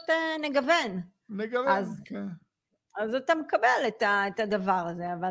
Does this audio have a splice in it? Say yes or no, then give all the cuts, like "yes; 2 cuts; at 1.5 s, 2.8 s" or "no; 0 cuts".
no; 0 cuts